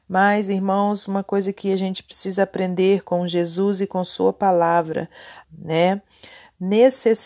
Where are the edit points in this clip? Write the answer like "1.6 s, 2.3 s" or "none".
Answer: 5.4 s